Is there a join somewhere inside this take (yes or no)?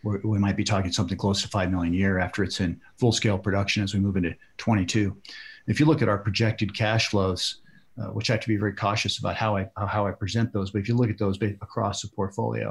no